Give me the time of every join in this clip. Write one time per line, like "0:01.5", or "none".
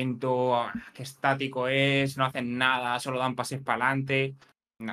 none